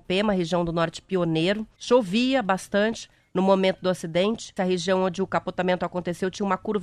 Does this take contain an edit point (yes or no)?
yes